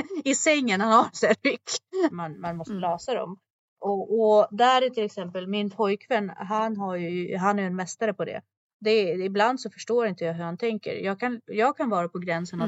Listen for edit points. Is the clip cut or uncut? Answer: cut